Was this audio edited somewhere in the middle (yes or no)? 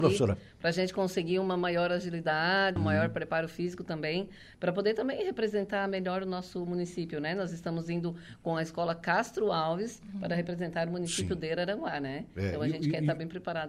yes